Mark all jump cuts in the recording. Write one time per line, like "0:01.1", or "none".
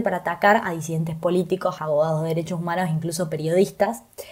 0:01.8